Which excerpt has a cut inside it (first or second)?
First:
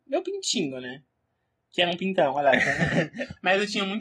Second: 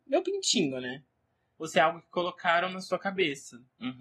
second